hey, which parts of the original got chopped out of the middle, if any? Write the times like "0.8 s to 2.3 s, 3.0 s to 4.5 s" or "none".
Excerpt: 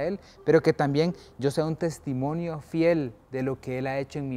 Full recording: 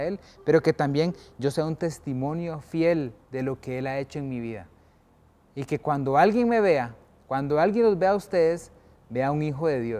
none